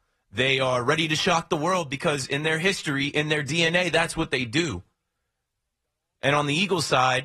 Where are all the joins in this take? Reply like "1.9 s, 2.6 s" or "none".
none